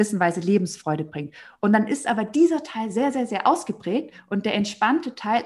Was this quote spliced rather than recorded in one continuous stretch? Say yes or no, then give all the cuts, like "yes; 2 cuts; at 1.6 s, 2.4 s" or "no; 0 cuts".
no; 0 cuts